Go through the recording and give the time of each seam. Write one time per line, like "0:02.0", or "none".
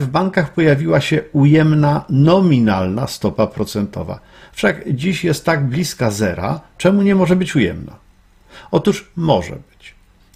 0:06.8